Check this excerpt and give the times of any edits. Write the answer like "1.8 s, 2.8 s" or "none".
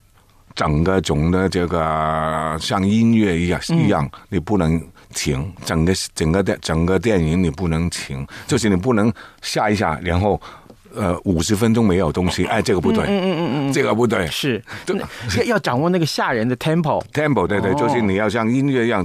5.6 s, 17.5 s